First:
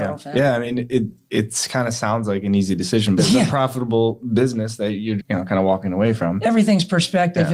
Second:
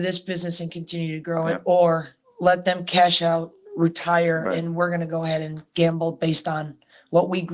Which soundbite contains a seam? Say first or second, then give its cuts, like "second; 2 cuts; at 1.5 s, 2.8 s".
first; 2 cuts; at 3.2 s, 5.2 s